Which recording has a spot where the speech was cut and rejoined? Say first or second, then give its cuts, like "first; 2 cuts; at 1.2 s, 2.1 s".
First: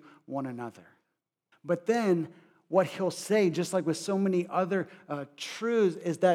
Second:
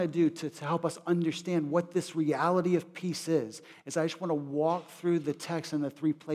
first; 1 cut; at 1.5 s